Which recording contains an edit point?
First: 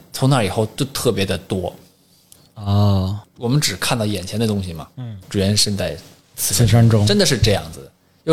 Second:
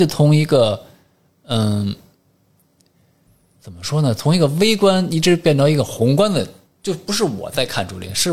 first; 2 cuts; at 3.2 s, 5.2 s

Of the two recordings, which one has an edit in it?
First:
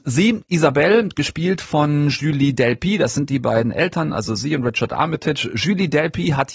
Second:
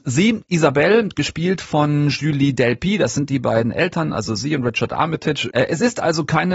second; 1 cut; at 5.5 s

